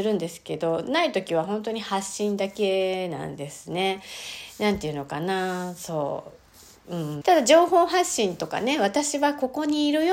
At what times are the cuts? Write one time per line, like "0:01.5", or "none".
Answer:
0:07.2